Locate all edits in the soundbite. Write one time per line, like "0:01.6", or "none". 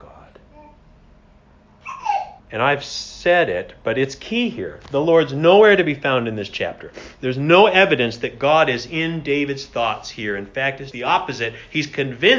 0:02.4
0:10.9